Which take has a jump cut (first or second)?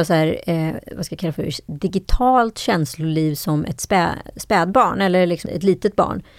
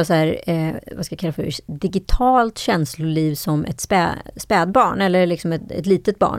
first